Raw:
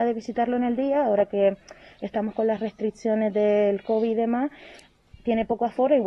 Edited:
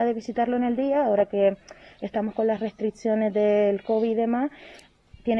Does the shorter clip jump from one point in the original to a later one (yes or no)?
no